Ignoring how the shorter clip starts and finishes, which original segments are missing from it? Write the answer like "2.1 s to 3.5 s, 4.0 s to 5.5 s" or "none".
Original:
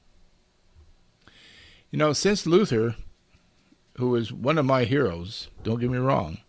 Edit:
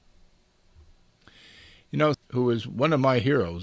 2.1 s to 3.8 s